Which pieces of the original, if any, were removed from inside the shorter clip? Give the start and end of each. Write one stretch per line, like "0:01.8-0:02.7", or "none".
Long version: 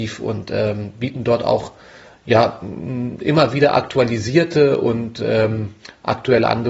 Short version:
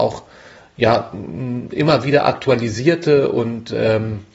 none

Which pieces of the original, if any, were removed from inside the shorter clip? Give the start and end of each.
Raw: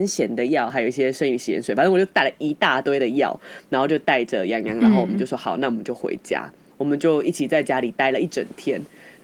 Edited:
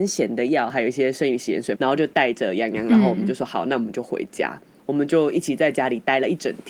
0:01.7-0:03.7

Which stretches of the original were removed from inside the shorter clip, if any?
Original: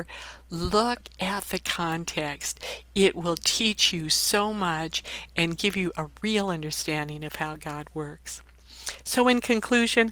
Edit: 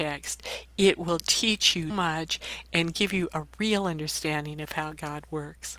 0:04.1-0:04.5

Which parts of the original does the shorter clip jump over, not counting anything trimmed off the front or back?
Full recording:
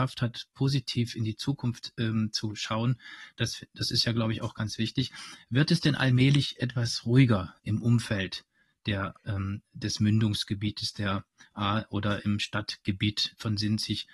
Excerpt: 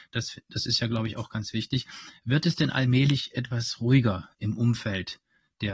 none

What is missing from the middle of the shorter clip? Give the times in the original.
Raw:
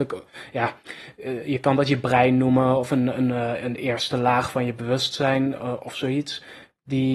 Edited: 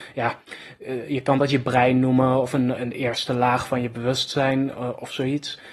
0:03.1-0:03.6

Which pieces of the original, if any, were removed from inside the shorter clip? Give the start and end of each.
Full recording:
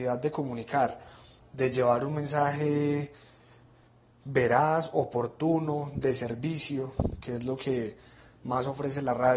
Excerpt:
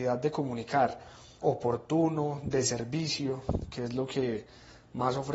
0:01.4-0:04.9

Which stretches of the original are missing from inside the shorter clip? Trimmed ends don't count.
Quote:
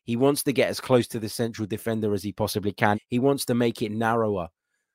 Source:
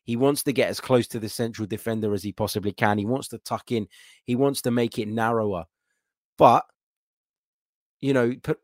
0:02.9-0:04.1

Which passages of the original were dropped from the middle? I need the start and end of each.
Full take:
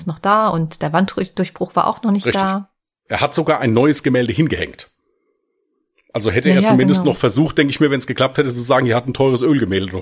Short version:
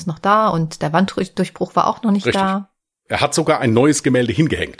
none

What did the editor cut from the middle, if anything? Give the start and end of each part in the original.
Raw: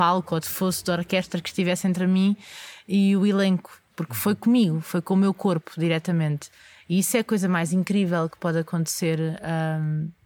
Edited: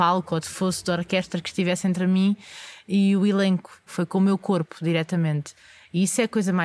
0:03.9-0:04.8

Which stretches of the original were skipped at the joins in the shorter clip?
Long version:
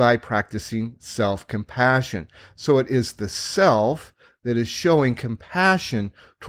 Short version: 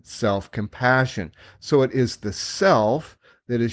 none

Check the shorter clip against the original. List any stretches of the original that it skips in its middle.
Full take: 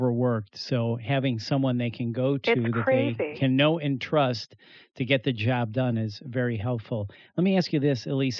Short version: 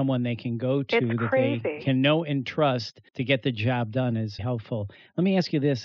0:04.6-0:04.9
0:06.2-0:06.6

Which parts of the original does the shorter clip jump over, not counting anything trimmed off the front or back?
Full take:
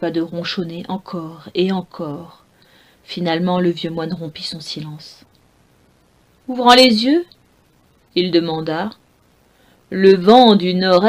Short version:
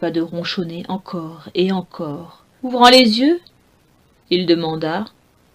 0:02.6-0:06.4

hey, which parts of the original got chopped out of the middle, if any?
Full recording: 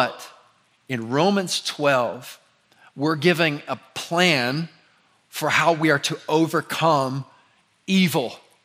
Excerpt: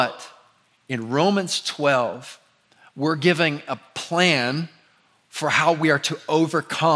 none

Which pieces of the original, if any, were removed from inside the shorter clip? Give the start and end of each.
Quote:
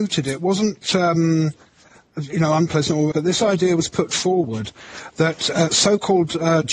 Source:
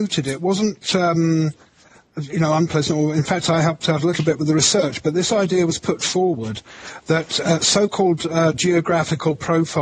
0:03.1-0:05.0

